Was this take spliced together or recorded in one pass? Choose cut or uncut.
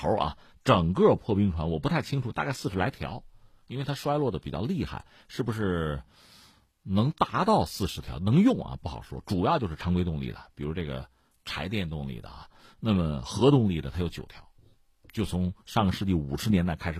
uncut